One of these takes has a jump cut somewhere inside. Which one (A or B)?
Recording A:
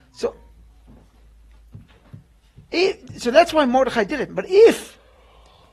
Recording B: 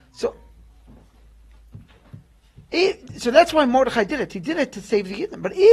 A